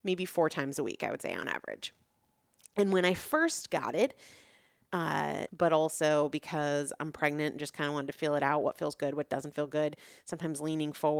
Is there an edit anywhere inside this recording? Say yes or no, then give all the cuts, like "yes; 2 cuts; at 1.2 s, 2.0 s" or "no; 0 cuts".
yes; 1 cut; at 5.5 s